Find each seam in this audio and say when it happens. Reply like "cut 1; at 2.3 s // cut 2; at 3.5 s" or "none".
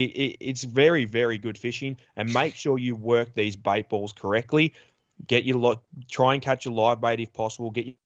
none